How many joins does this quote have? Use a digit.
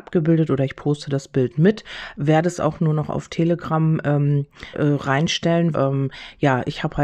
2